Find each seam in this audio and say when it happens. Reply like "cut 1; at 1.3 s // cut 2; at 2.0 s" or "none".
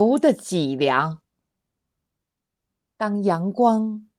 cut 1; at 2.9 s